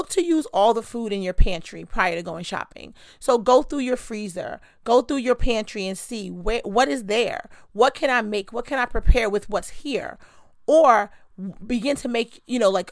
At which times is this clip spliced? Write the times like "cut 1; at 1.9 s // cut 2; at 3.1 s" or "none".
none